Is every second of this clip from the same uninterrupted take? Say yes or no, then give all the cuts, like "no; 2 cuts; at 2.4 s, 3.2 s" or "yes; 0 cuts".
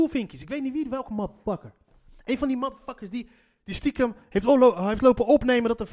yes; 0 cuts